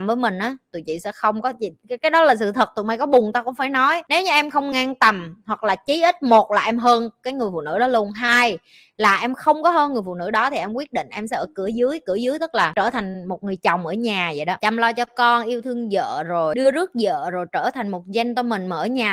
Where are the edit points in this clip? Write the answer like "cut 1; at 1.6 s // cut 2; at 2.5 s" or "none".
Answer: none